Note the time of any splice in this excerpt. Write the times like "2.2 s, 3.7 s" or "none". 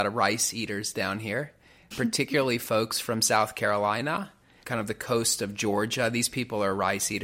1.9 s, 4.6 s